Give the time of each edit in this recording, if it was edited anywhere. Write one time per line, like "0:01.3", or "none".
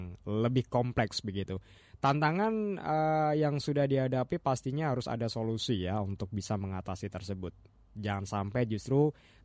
none